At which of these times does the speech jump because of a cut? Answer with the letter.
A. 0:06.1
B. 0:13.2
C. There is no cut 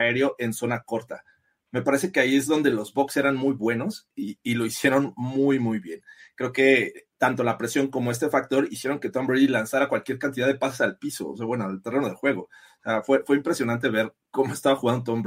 C